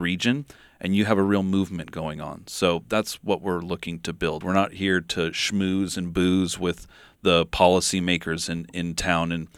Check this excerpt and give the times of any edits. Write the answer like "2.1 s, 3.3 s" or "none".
4.4 s